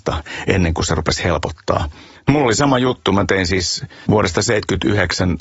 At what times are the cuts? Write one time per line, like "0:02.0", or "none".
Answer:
none